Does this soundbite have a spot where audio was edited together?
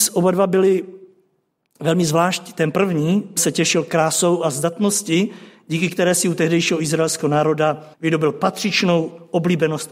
yes; 2 cuts; at 3.4 s, 7.9 s

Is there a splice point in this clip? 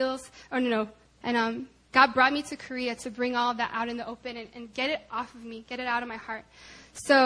yes; 1 cut; at 1.2 s

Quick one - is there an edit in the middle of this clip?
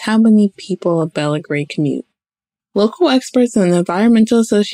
yes; 1 cut; at 2.6 s

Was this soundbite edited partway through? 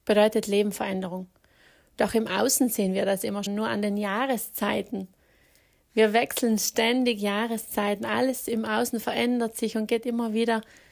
yes; 1 cut; at 3.5 s

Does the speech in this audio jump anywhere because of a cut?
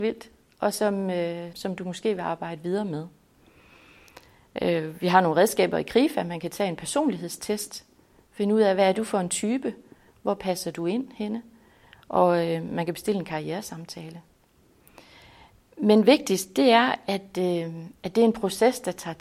yes; 1 cut; at 1.5 s

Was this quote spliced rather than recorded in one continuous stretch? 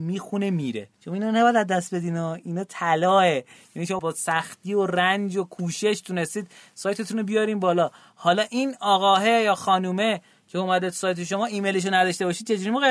yes; 2 cuts; at 0.9 s, 4.0 s

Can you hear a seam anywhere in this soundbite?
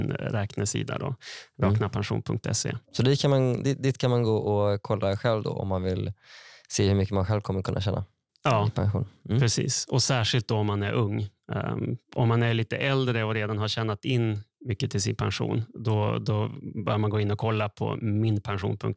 no; 0 cuts

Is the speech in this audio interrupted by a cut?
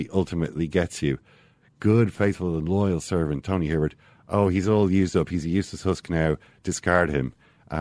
no; 0 cuts

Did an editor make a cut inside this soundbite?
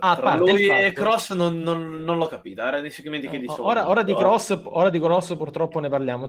no; 0 cuts

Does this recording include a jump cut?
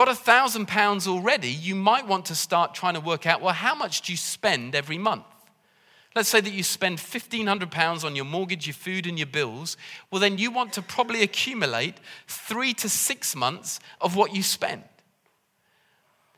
no; 0 cuts

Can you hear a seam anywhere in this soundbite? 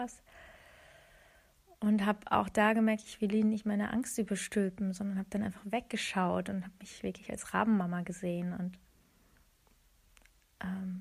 no; 0 cuts

